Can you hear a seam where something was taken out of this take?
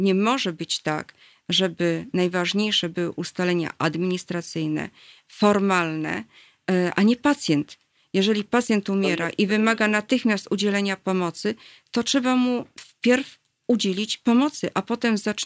no; 0 cuts

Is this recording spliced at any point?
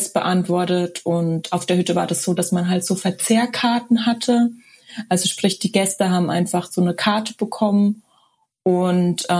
no; 0 cuts

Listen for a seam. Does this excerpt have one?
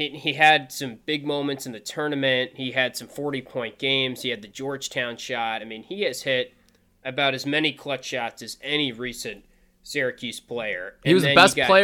no; 0 cuts

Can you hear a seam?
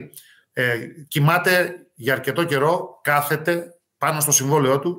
no; 0 cuts

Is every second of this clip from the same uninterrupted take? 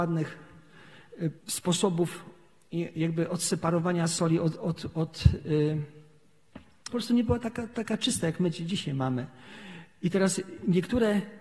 no; 2 cuts; at 1.4 s, 6.9 s

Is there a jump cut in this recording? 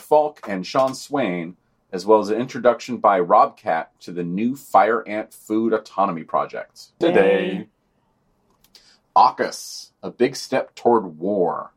yes; 1 cut; at 7.0 s

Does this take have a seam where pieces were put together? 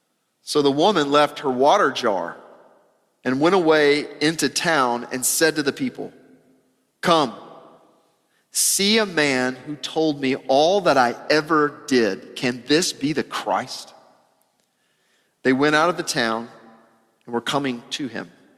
no; 0 cuts

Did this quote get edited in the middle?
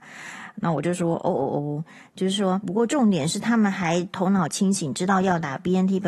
yes; 1 cut; at 2.6 s

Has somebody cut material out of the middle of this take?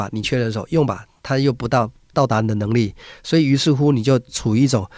no; 0 cuts

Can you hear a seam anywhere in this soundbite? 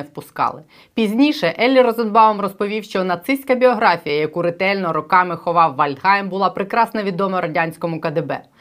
no; 0 cuts

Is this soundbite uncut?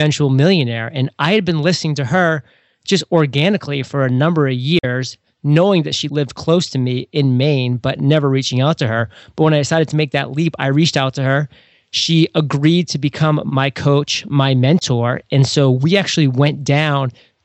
yes; 0 cuts

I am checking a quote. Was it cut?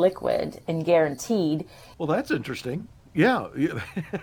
yes; 1 cut; at 1.9 s

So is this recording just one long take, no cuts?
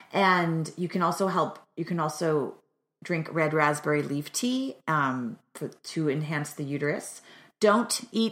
yes; 0 cuts

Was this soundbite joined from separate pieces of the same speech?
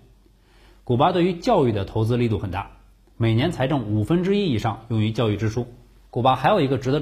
yes; 1 cut; at 6.1 s

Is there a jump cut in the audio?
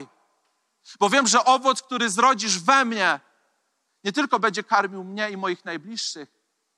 no; 0 cuts

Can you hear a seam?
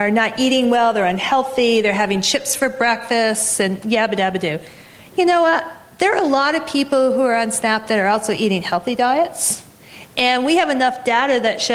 no; 0 cuts

